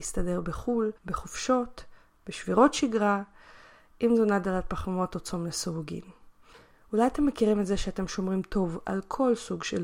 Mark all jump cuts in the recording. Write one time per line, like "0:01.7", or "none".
0:01.0